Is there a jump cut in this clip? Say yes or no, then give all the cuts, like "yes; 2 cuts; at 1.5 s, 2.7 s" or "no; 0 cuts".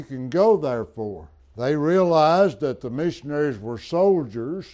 yes; 1 cut; at 1.4 s